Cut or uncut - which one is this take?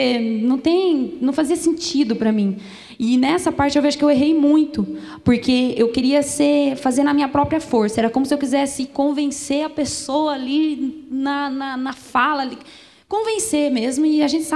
uncut